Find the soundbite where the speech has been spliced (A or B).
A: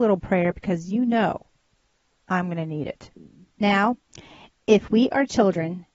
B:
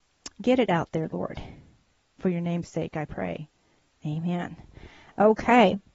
A